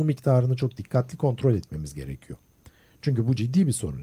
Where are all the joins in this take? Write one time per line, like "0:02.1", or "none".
none